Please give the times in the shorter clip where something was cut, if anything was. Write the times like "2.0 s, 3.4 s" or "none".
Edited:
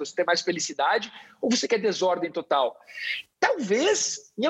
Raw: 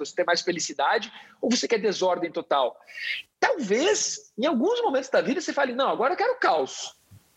none